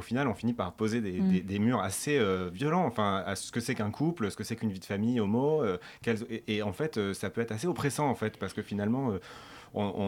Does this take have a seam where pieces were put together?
no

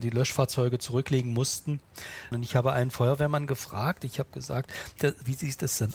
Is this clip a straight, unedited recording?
no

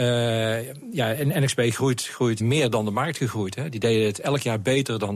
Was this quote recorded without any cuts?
no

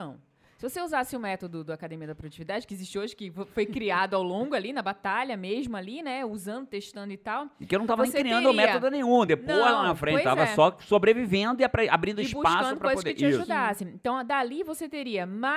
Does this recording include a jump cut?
no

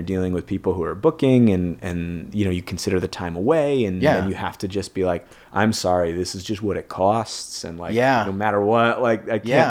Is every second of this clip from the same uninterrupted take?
yes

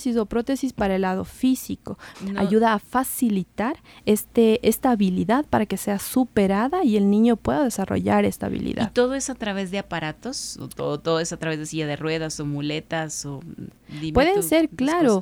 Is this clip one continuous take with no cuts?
no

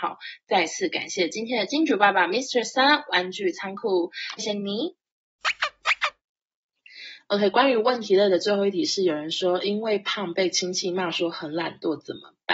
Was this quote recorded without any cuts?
no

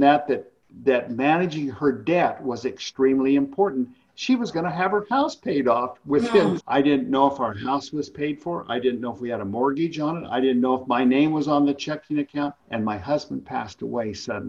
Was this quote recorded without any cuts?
no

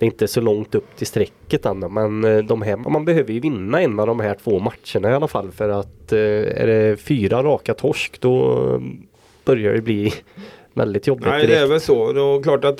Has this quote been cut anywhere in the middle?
yes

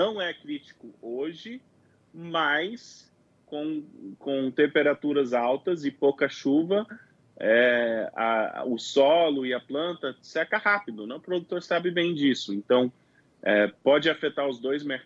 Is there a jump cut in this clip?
no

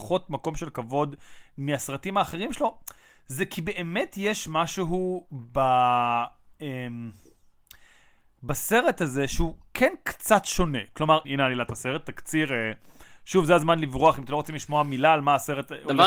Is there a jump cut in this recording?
yes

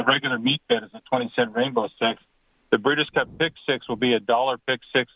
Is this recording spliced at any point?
no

